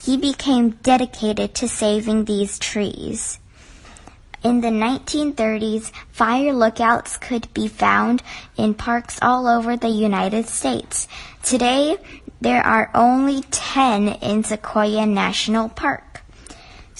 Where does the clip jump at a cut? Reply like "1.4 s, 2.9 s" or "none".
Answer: 4.4 s, 11.3 s